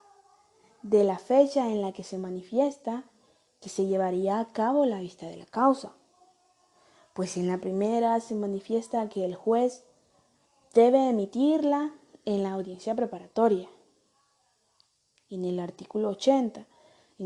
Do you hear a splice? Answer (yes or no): no